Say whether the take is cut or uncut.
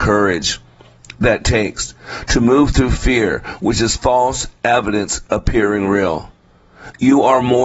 uncut